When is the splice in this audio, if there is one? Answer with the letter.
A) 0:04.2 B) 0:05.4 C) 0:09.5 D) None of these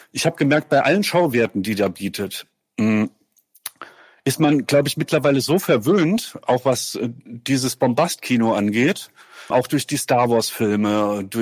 C